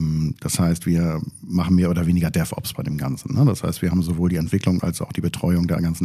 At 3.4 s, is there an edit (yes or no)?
no